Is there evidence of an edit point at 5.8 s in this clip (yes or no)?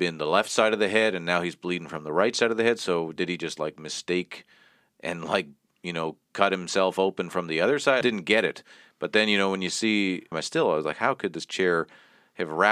no